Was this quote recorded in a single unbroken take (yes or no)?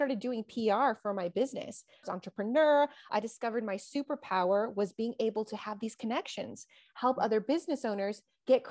no